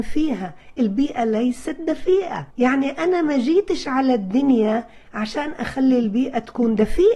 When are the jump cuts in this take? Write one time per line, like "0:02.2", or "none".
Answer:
0:02.5